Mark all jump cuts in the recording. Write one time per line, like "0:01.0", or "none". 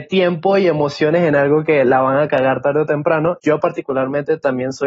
0:03.4